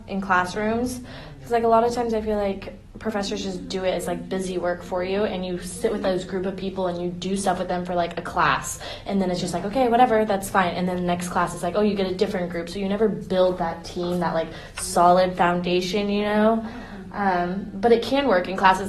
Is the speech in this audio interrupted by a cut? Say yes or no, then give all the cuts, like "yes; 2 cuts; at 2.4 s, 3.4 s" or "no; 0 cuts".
no; 0 cuts